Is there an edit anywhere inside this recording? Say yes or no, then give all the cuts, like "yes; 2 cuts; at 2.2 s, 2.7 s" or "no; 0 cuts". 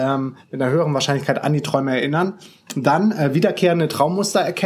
no; 0 cuts